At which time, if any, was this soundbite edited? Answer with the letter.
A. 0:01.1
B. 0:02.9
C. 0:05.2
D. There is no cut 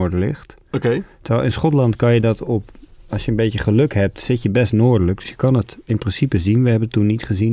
D